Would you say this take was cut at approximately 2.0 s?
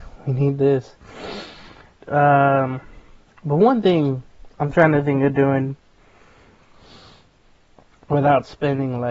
yes; 1 cut; at 2.0 s

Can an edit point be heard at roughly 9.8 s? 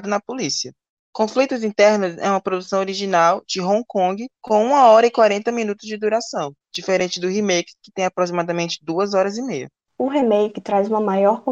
no; 0 cuts

